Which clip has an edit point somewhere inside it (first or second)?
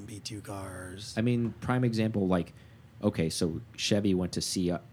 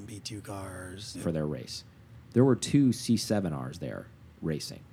second